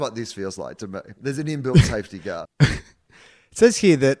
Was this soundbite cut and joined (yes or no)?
yes